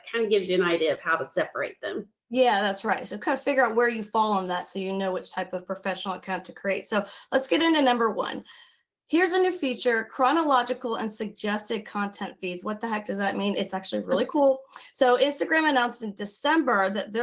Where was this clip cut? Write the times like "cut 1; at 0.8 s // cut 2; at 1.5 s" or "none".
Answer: none